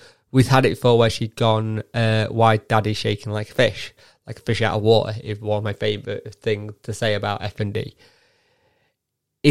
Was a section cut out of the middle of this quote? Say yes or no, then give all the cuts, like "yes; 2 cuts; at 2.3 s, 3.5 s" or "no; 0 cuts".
no; 0 cuts